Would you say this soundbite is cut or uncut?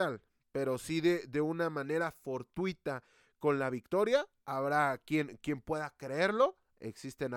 uncut